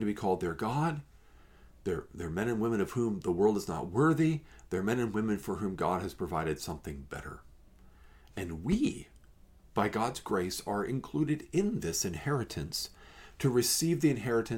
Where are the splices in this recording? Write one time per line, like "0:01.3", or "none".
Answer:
none